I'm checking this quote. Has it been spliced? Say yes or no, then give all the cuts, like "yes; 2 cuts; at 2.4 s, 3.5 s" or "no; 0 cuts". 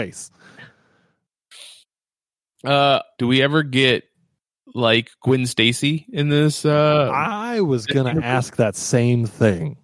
yes; 1 cut; at 3.2 s